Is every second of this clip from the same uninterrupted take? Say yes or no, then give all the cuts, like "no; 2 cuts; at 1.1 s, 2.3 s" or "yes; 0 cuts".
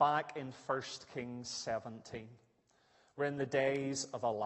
yes; 0 cuts